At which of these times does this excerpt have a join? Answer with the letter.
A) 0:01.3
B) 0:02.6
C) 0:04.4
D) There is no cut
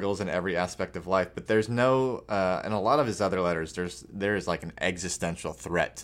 D